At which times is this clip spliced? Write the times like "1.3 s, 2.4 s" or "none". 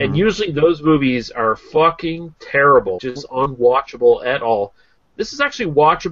3.0 s